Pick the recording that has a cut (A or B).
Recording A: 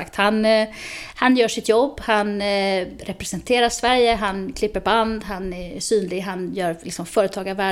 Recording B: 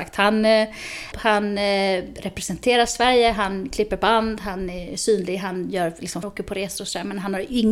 B